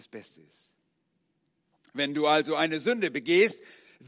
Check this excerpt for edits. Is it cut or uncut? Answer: uncut